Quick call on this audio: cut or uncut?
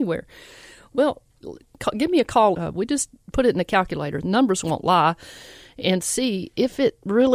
cut